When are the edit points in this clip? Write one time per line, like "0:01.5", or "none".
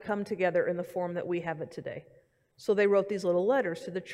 0:02.5